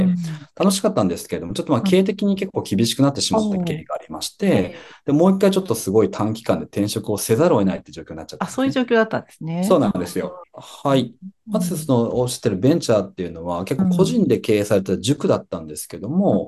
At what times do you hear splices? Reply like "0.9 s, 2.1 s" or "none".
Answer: 10.4 s